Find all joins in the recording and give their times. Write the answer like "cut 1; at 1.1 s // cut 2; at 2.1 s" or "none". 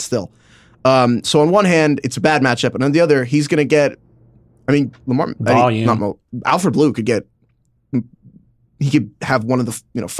none